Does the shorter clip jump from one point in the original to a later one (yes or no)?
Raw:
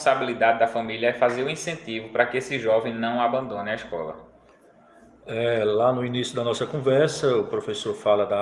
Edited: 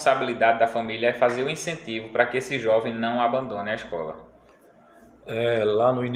no